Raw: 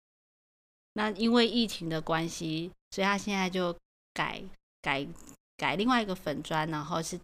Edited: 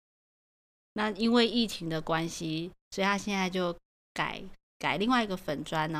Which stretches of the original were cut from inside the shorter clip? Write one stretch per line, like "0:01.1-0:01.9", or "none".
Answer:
0:04.6-0:05.4

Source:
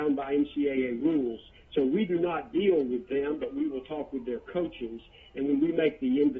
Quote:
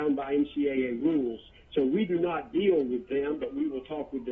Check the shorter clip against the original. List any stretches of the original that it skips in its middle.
none

